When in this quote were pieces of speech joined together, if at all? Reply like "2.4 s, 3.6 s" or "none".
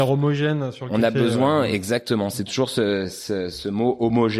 none